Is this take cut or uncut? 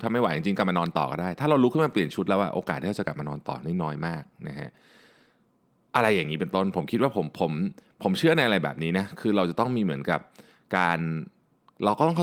uncut